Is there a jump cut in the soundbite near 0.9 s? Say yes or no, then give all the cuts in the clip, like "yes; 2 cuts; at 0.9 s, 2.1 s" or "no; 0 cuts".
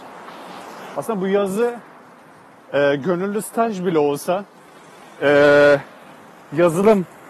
yes; 1 cut; at 0.9 s